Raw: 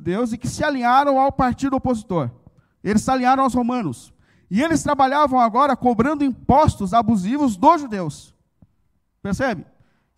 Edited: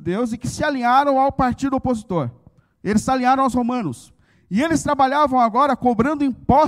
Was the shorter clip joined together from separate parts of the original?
no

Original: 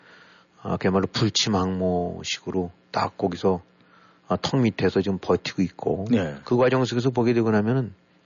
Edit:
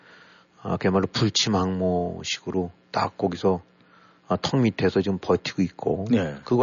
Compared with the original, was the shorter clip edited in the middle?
no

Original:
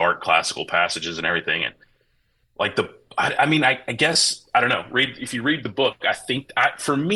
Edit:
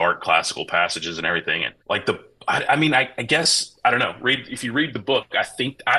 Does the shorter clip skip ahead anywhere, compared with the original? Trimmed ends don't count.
yes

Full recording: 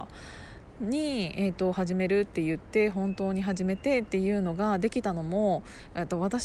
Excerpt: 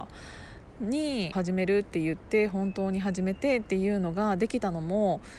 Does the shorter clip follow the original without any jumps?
no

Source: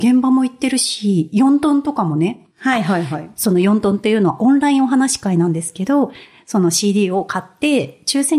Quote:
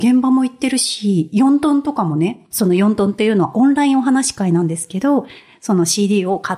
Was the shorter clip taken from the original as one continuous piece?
no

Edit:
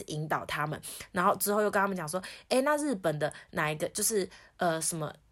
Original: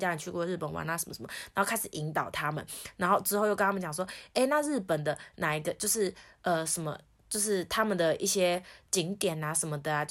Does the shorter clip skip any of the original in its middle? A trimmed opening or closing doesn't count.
no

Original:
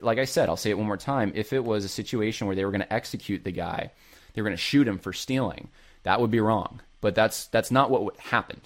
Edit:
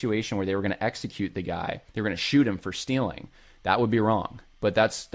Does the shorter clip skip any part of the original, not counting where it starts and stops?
yes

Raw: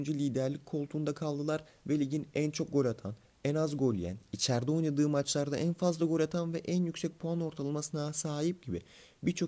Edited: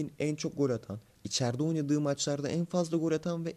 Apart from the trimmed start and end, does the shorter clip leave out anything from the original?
yes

